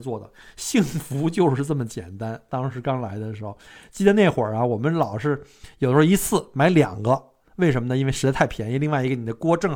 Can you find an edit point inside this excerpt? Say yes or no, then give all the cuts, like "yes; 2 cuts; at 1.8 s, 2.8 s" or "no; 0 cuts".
no; 0 cuts